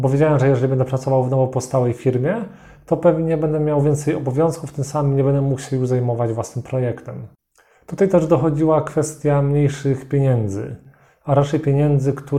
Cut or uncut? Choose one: uncut